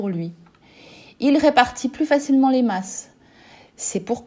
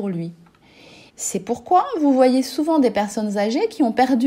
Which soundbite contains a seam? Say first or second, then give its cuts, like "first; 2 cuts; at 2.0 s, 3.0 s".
second; 1 cut; at 1.1 s